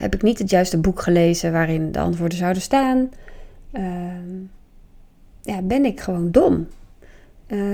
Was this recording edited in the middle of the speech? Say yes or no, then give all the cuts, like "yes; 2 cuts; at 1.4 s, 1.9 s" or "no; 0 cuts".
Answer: no; 0 cuts